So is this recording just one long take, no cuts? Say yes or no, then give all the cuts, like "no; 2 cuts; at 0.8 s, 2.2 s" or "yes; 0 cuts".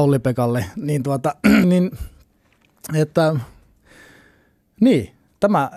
no; 1 cut; at 1.6 s